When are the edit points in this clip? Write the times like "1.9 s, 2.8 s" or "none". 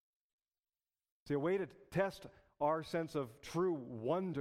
1.1 s